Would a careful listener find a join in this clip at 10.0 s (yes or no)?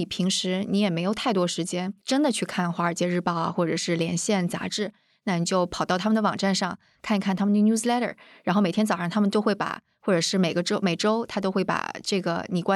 no